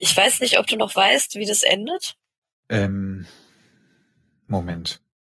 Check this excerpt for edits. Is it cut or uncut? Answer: uncut